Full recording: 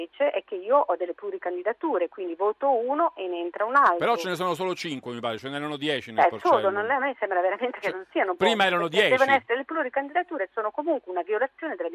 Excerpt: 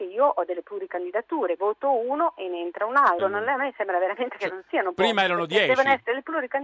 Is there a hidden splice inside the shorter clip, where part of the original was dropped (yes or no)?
yes